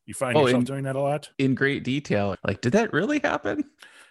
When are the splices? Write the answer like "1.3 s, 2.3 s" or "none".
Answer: 1.3 s, 2.3 s